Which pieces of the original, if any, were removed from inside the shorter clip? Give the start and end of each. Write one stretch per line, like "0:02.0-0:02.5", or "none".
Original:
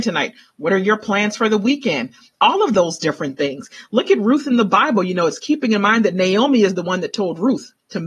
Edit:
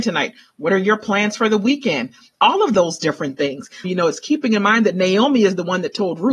0:03.8-0:05.0